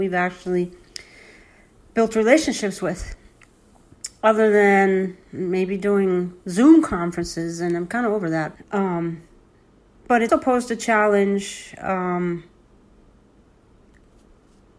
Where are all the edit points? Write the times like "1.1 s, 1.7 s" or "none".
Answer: 8.5 s, 10.3 s